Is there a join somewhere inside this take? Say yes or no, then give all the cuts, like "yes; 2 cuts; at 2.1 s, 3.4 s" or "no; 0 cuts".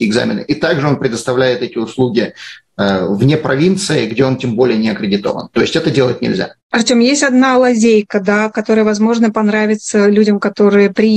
yes; 1 cut; at 6.6 s